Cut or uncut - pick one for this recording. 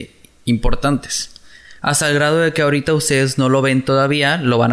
uncut